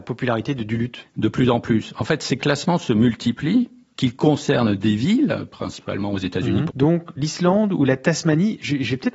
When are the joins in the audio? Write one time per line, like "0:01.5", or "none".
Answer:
0:06.7